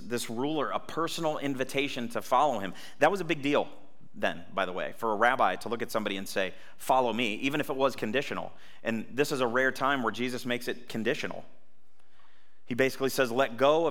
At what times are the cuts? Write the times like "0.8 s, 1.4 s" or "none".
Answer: none